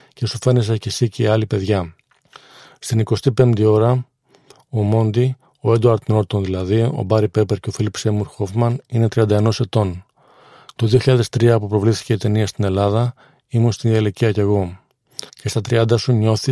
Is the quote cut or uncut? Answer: cut